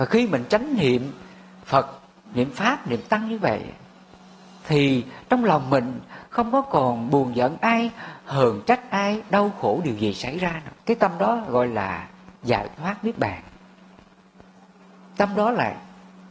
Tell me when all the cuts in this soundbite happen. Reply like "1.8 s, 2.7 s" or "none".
10.8 s, 12.4 s